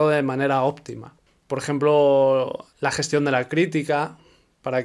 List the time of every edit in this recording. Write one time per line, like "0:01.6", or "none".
0:01.3